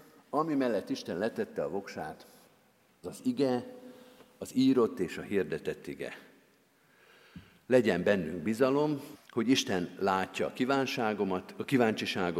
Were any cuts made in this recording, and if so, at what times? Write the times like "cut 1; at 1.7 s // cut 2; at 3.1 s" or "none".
cut 1; at 3.0 s // cut 2; at 9.1 s